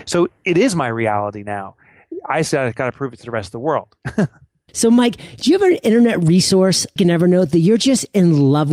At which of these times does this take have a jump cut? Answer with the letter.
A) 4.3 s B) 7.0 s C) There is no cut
B